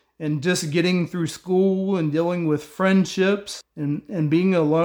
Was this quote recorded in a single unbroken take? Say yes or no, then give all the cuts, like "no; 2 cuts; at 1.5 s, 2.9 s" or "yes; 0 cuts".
no; 1 cut; at 3.6 s